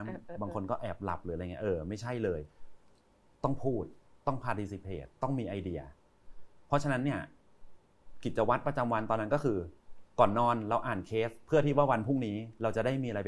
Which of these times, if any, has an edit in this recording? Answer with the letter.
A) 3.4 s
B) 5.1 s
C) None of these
C